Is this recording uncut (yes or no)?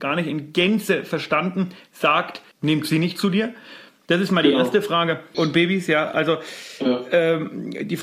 no